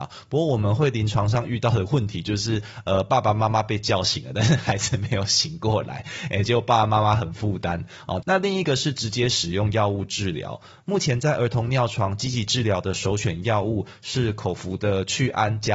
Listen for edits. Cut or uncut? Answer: cut